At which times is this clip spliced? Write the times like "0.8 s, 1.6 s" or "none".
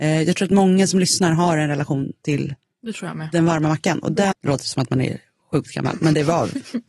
4.3 s